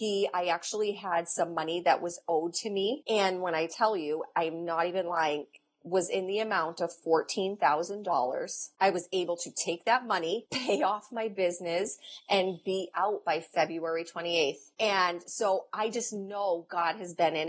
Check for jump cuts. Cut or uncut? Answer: uncut